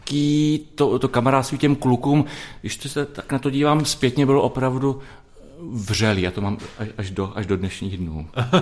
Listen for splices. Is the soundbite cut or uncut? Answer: uncut